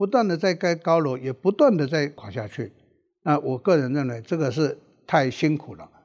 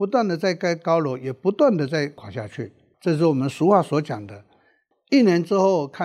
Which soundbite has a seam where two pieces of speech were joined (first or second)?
second